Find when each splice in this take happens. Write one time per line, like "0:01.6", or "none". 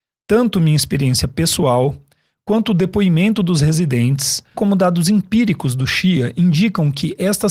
0:04.5